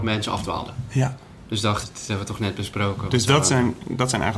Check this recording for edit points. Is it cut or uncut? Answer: cut